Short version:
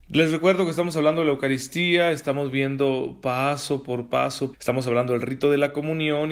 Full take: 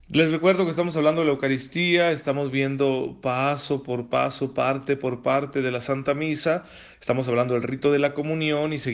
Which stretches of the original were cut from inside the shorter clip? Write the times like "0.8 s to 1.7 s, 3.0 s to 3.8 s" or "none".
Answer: 4.5 s to 6.9 s